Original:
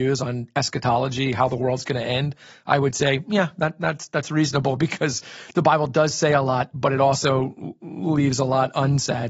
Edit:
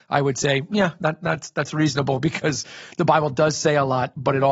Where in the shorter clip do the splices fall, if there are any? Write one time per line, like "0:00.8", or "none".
none